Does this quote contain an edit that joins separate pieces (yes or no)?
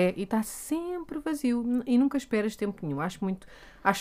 no